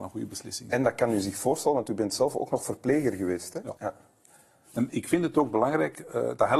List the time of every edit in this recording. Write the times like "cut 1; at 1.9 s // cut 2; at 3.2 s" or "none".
cut 1; at 3.8 s // cut 2; at 4.9 s